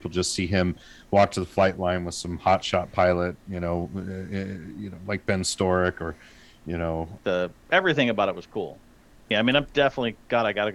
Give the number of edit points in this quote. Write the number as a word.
two